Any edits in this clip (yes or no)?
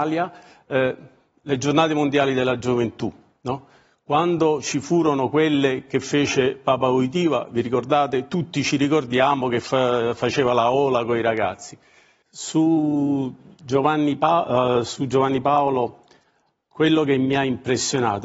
yes